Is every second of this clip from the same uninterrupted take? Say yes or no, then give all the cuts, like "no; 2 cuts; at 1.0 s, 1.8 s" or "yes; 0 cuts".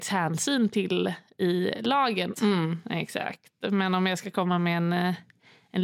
no; 1 cut; at 2.3 s